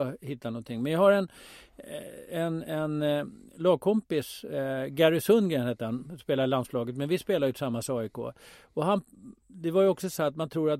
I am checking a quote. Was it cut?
no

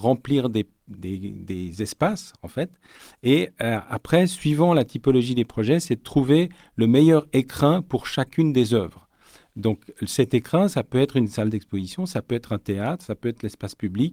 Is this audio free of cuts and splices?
yes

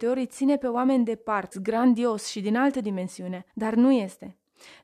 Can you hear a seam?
yes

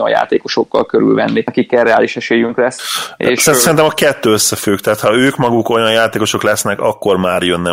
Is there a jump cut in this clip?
no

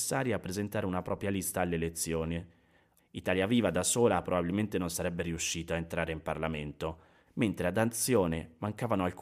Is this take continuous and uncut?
no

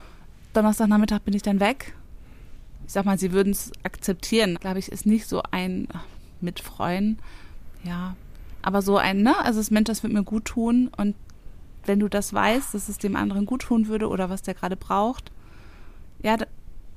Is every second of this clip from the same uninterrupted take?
no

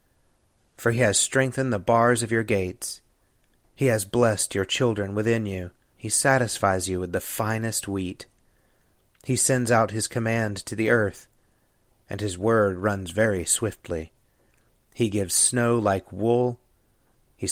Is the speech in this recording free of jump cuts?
no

